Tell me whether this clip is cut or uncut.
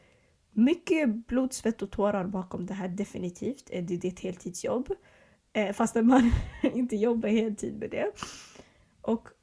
uncut